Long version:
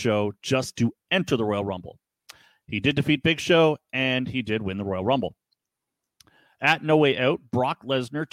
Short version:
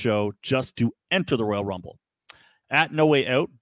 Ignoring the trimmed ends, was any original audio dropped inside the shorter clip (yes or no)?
yes